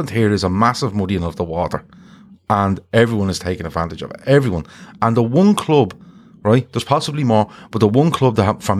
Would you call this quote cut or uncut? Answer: uncut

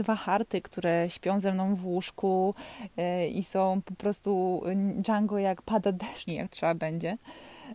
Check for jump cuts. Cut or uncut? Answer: cut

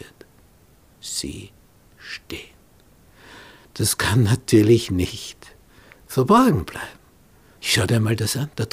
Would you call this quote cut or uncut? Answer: cut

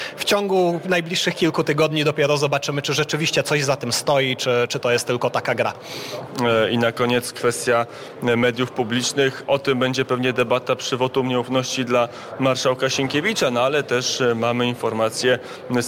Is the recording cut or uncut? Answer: uncut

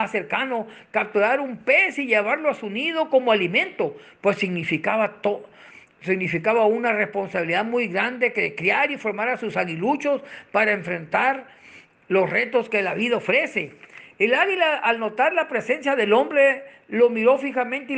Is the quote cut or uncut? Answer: uncut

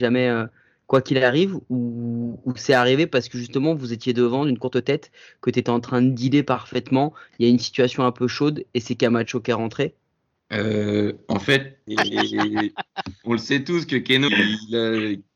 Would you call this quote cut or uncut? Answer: cut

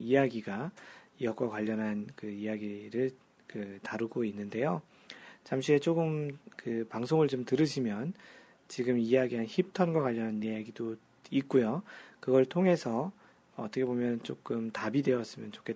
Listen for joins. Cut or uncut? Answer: uncut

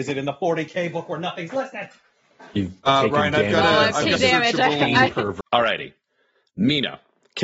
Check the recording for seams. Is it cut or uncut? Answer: cut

